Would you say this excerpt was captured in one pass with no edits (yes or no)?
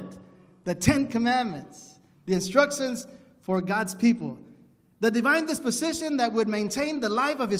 yes